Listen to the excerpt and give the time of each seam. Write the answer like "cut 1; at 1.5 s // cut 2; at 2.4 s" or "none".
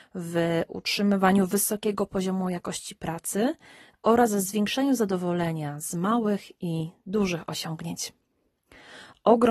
none